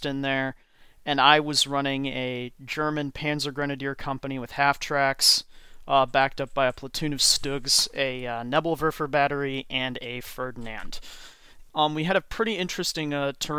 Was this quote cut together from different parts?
yes; 1 cut; at 11.7 s

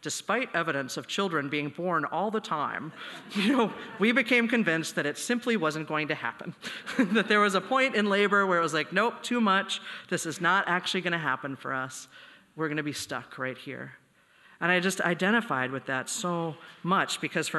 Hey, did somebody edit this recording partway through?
no; 0 cuts

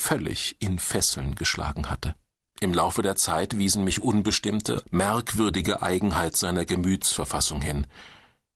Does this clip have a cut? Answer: yes; 2 cuts; at 2.5 s, 4.8 s

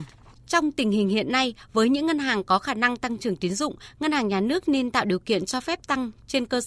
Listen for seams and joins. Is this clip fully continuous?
yes; 0 cuts

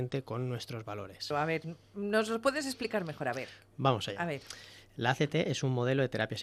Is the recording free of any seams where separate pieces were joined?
no; 1 cut; at 1.3 s

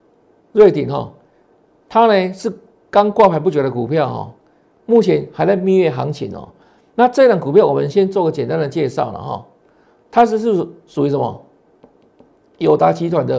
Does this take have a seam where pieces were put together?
no; 0 cuts

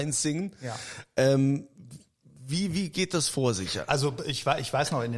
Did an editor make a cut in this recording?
no; 0 cuts

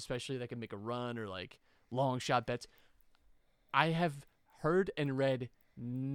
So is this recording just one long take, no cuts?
yes; 0 cuts

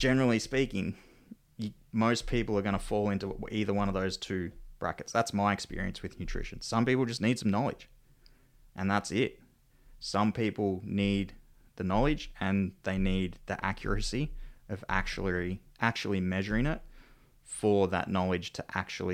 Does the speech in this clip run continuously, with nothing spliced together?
yes; 0 cuts

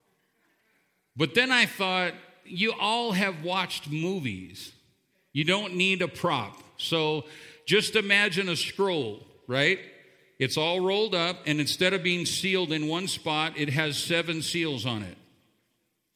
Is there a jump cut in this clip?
no; 0 cuts

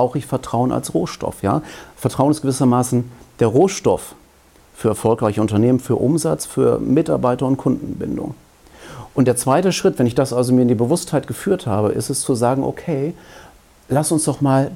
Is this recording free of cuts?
yes; 0 cuts

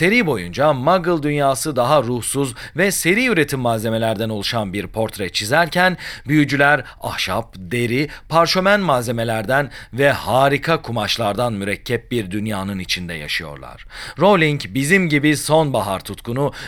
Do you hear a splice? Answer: no; 0 cuts

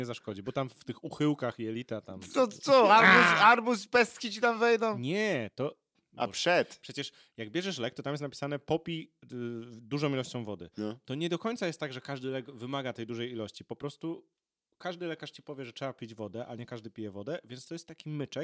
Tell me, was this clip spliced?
no; 0 cuts

